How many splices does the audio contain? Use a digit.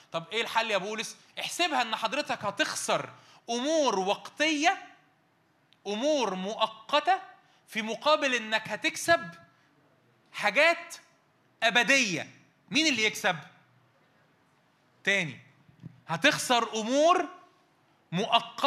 1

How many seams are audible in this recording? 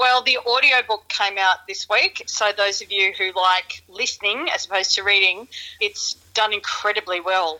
1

